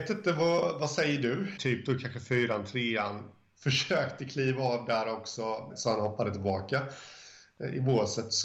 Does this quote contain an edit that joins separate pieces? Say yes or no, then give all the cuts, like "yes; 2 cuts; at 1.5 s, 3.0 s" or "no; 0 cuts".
yes; 2 cuts; at 1.6 s, 5.7 s